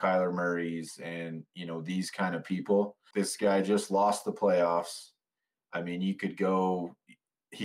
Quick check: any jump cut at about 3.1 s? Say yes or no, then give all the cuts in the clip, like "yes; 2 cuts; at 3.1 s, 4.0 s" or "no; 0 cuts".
yes; 1 cut; at 3.1 s